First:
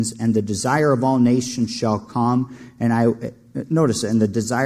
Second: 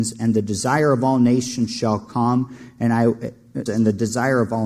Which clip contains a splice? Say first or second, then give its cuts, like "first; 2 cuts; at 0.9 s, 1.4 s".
second; 1 cut; at 3.7 s